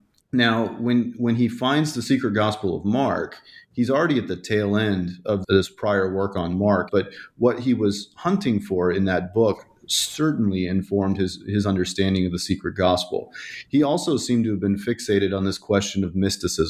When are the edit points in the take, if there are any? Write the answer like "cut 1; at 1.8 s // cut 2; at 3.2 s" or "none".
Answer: cut 1; at 5.4 s // cut 2; at 6.9 s